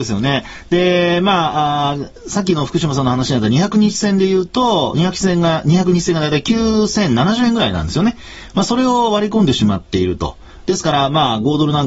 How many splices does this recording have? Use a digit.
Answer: 0